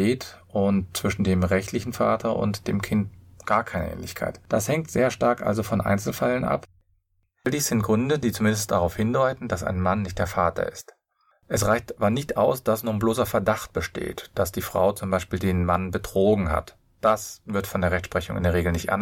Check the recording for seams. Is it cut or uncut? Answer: uncut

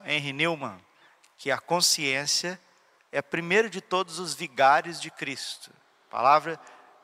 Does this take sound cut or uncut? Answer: uncut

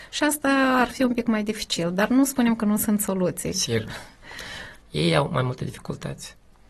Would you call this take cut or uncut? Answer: cut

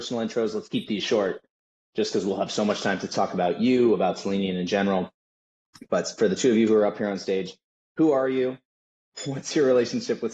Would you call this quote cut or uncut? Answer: uncut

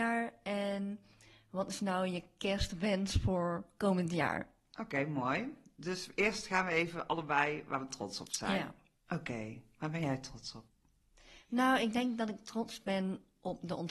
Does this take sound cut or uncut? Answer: uncut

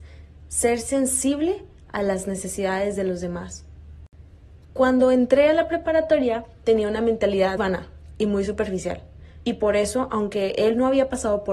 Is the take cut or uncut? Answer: cut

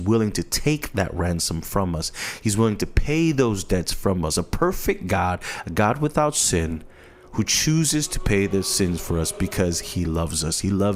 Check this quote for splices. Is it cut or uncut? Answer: uncut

